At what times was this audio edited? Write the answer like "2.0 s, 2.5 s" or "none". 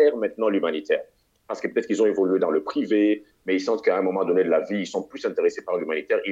none